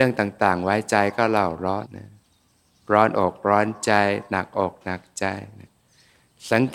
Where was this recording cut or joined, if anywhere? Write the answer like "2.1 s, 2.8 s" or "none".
1.8 s